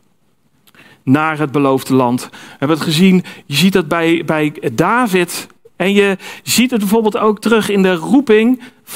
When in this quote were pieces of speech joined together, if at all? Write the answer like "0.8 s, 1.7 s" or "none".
5.8 s